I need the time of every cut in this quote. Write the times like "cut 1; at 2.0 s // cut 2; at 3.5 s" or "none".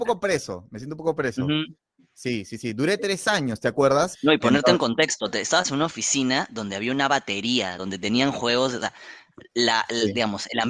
cut 1; at 4.1 s // cut 2; at 7.8 s